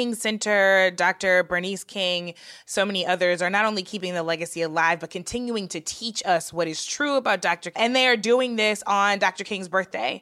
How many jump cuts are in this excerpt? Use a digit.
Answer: 1